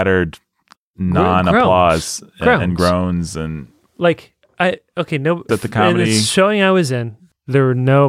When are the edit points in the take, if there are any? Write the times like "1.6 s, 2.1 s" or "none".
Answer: 5.5 s